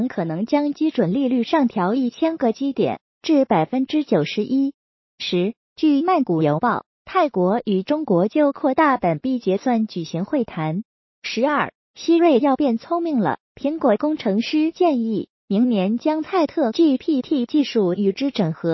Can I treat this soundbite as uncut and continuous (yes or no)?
no